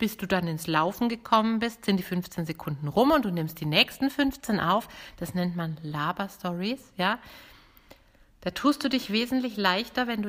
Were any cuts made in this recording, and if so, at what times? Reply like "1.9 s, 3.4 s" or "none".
none